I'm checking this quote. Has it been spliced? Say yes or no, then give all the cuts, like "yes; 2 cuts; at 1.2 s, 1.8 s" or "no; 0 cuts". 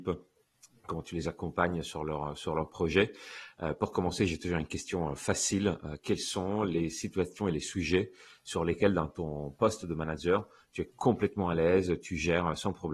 no; 0 cuts